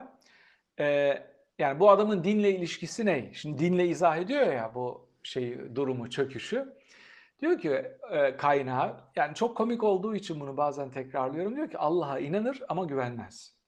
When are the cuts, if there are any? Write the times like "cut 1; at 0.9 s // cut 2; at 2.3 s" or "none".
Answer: none